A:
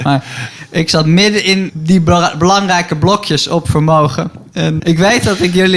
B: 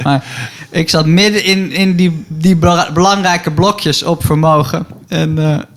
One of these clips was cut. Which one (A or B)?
A